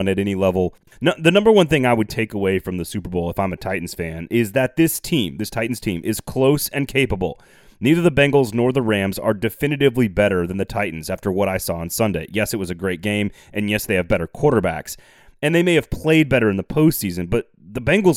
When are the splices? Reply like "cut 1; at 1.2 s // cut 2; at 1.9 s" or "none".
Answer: none